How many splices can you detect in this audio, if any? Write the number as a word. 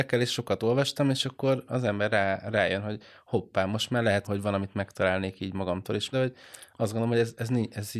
two